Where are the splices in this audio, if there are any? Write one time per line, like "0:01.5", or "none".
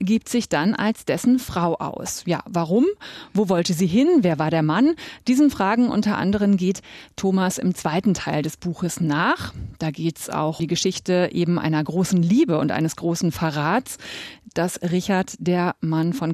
0:10.6
0:14.5